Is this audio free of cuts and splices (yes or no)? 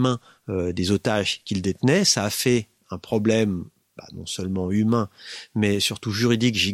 yes